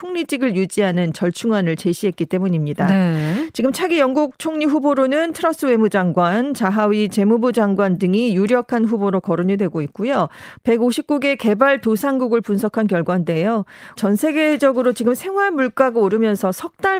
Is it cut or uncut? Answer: cut